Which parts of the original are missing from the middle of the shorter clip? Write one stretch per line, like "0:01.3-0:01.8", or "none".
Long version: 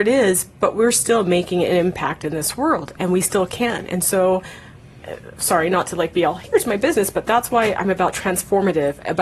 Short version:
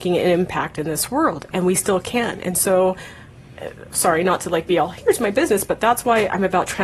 none